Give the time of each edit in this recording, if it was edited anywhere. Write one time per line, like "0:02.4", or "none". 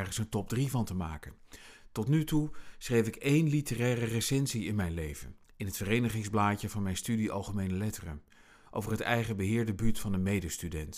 0:05.4